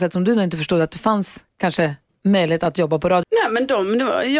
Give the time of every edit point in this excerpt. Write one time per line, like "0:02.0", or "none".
0:03.2